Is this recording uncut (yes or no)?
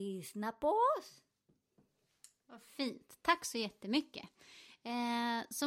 yes